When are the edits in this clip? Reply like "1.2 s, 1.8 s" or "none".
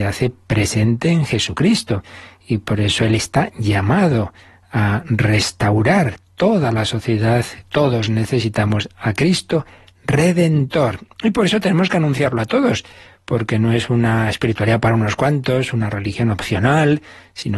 7.6 s